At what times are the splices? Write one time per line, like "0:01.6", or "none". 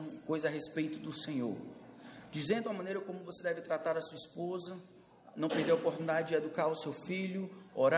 none